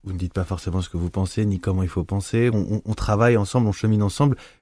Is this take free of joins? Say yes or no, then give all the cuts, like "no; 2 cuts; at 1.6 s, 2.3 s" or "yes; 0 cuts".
no; 1 cut; at 2.5 s